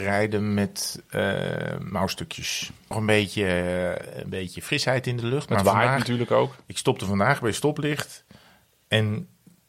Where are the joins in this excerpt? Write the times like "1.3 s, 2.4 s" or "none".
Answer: 2.9 s